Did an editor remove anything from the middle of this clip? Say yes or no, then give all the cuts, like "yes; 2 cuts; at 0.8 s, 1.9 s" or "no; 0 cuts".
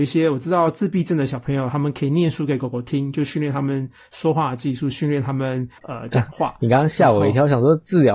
yes; 1 cut; at 5.8 s